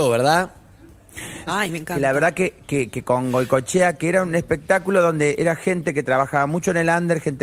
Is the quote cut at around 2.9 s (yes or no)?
no